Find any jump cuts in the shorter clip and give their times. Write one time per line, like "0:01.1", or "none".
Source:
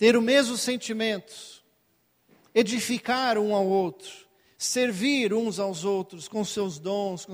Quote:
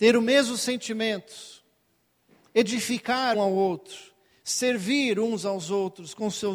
0:03.3